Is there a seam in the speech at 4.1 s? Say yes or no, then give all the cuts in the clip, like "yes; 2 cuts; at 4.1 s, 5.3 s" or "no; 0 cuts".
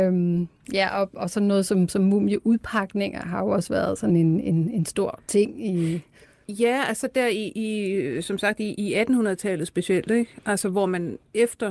no; 0 cuts